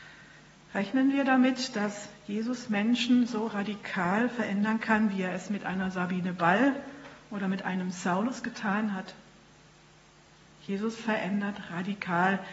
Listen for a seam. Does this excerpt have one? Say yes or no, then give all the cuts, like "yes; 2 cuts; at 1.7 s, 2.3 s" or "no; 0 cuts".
no; 0 cuts